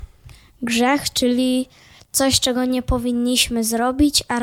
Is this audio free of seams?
yes; 0 cuts

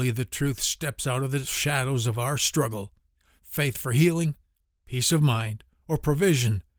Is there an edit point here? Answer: no; 0 cuts

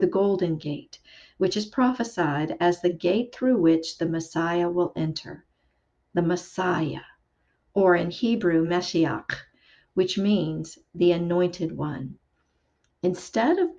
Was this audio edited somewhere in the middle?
no; 0 cuts

